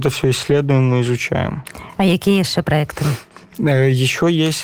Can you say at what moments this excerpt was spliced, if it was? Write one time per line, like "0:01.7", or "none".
none